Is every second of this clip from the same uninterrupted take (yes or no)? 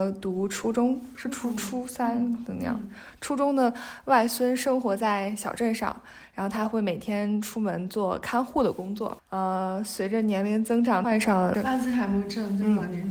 yes